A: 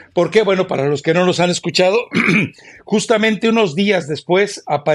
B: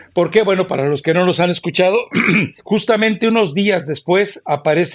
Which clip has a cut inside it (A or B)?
B